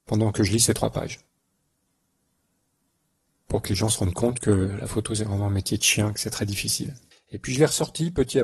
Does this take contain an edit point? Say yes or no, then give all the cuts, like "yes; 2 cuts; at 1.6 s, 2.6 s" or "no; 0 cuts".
yes; 1 cut; at 7.1 s